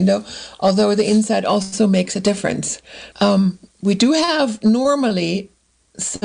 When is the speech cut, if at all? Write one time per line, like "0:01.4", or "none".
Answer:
0:03.1